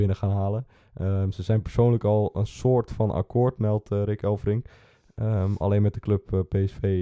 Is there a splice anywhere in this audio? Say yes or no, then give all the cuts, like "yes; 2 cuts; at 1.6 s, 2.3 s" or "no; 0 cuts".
no; 0 cuts